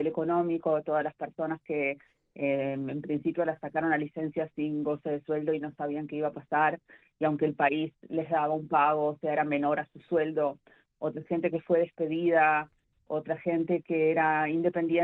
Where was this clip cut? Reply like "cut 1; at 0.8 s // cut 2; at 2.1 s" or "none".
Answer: none